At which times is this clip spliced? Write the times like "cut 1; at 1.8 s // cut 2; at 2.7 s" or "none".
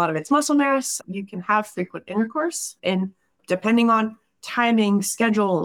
cut 1; at 1.0 s